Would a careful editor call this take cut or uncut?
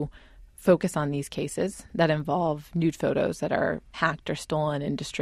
uncut